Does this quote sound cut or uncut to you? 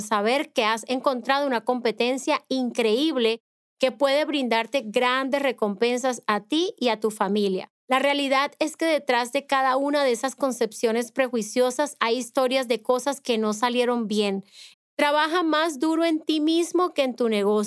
cut